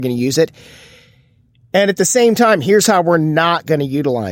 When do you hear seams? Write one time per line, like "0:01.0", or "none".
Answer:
none